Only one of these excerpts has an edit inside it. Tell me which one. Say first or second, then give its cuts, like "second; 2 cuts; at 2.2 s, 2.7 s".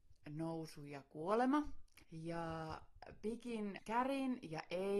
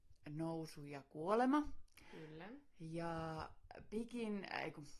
first; 2 cuts; at 2.0 s, 3.8 s